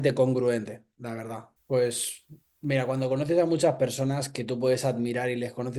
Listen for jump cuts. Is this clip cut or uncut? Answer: cut